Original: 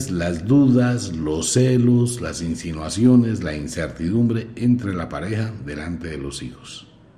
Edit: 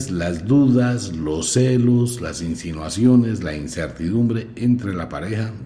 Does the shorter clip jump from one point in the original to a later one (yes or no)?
no